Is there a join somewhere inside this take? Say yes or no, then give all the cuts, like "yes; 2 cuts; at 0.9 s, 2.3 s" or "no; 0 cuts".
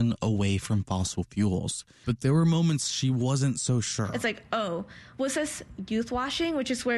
yes; 1 cut; at 2.0 s